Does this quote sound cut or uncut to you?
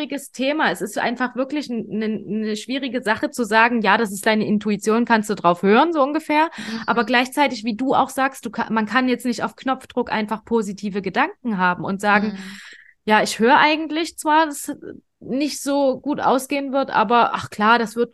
uncut